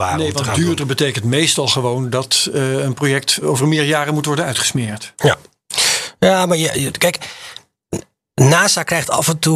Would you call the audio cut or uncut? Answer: cut